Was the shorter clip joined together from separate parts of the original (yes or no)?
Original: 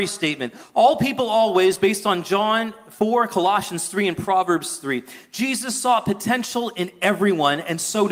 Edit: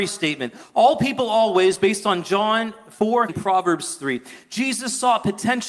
yes